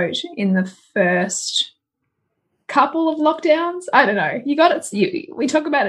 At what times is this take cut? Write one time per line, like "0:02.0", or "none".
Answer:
none